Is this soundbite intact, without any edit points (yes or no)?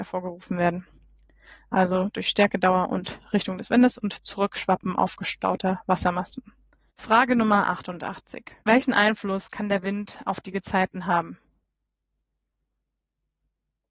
no